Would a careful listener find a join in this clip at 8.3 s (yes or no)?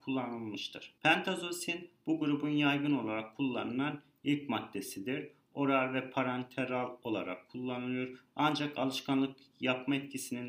yes